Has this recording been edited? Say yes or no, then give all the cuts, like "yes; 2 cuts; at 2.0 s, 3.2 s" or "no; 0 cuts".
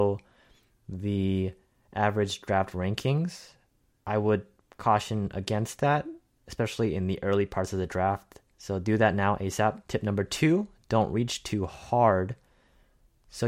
yes; 2 cuts; at 8.5 s, 9.8 s